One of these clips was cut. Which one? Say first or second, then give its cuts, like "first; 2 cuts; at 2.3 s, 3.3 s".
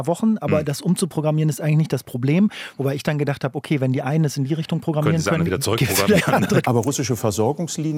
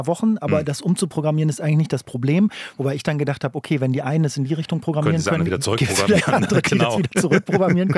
first; 1 cut; at 6.6 s